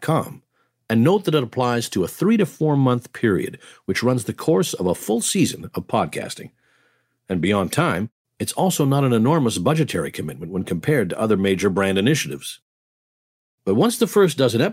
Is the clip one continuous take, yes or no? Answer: yes